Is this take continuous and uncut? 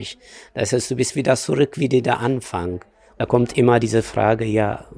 yes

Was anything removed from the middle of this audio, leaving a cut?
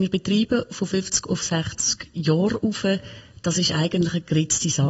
no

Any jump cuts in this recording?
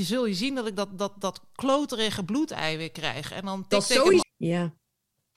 yes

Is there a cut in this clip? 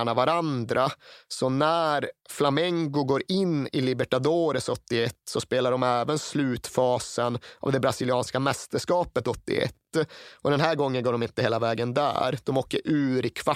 yes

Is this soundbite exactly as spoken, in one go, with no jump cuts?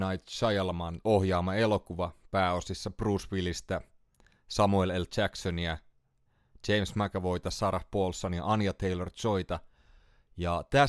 yes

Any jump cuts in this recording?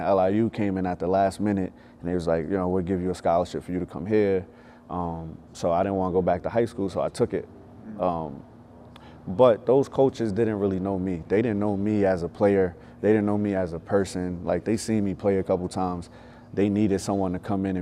no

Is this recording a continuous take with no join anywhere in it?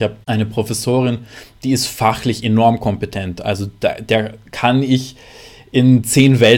yes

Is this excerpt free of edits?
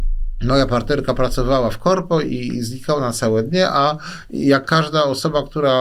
yes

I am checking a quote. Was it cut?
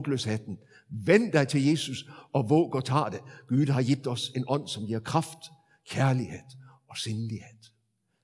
no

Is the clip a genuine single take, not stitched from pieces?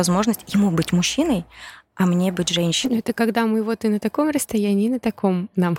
yes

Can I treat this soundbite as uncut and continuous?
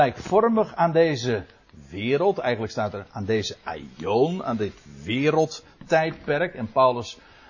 yes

